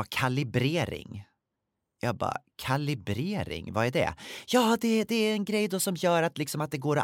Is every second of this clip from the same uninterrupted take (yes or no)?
yes